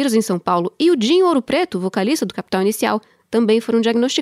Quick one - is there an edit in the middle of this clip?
no; 0 cuts

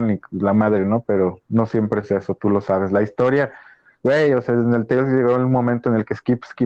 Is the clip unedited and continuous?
yes; 0 cuts

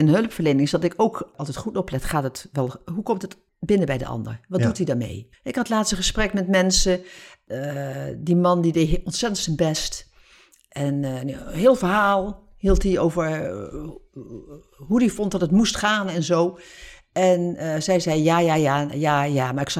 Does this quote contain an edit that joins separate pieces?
yes; 1 cut; at 5.3 s

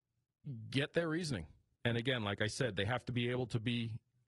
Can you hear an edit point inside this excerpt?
yes; 1 cut; at 1.8 s

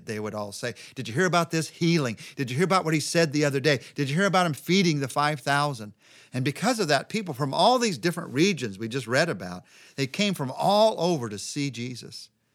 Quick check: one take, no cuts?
yes; 0 cuts

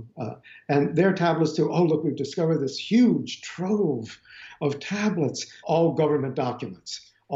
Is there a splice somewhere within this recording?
yes; 1 cut; at 5.6 s

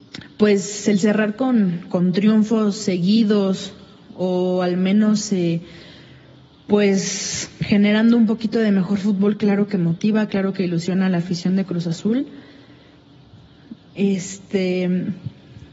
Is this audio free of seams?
yes; 0 cuts

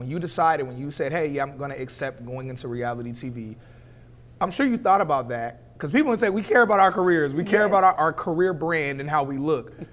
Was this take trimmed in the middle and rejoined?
yes; 1 cut; at 8.0 s

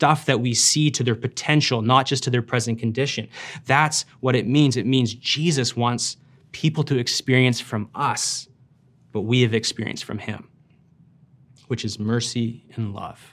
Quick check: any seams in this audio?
no; 0 cuts

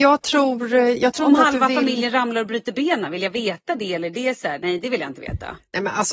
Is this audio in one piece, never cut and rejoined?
yes; 0 cuts

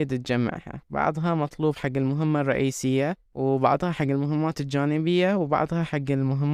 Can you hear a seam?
yes; 1 cut; at 3.3 s

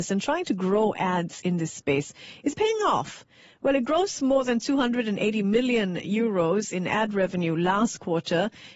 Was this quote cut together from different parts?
yes; 1 cut; at 2.5 s

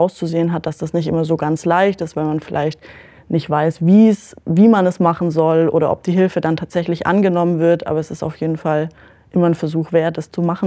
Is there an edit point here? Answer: no; 0 cuts

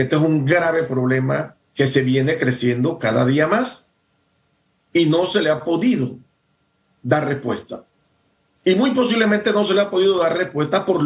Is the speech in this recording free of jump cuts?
yes; 0 cuts

